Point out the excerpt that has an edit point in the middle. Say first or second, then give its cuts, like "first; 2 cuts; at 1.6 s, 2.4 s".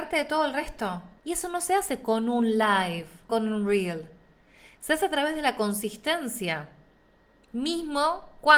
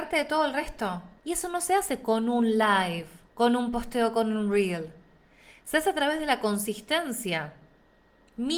first; 1 cut; at 3.3 s